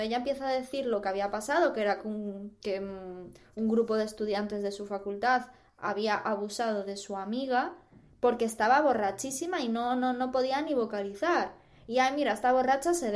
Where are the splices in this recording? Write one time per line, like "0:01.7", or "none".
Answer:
none